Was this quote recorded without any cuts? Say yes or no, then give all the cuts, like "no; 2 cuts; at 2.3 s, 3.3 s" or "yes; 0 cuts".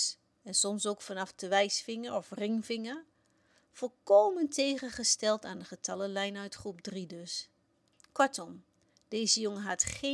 yes; 0 cuts